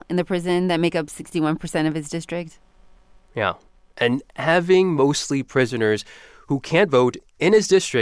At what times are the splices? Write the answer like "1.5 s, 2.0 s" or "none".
none